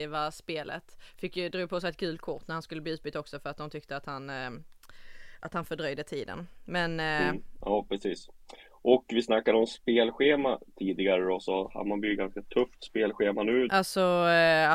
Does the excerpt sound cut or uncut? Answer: cut